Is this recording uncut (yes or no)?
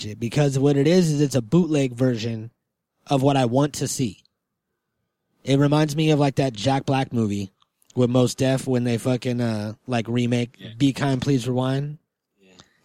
yes